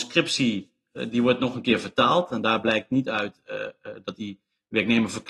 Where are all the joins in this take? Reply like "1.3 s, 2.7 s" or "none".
none